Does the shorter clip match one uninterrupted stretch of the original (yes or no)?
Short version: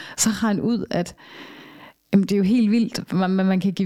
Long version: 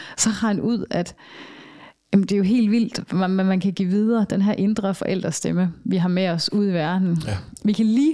yes